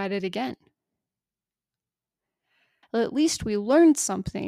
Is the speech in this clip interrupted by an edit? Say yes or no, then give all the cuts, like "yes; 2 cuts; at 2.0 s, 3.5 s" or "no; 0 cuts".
yes; 1 cut; at 2.8 s